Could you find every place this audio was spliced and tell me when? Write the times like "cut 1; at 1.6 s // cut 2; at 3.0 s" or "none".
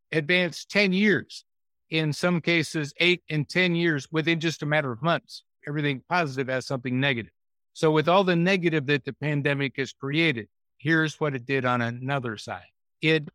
cut 1; at 5.6 s